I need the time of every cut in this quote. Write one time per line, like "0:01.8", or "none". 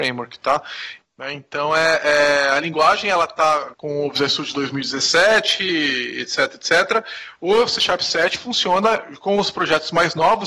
0:01.0
0:03.7